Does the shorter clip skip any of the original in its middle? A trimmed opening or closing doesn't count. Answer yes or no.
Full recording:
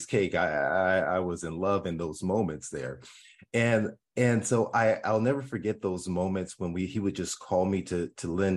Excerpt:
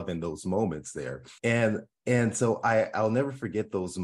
yes